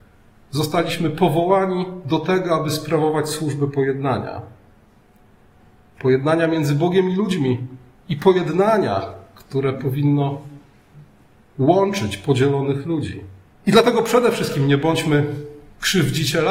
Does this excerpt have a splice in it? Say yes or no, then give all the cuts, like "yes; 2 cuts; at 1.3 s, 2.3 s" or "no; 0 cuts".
yes; 1 cut; at 13.5 s